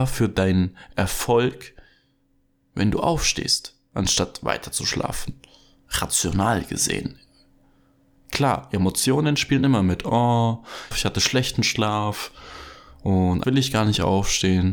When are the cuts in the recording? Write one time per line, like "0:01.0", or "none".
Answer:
0:10.9
0:13.4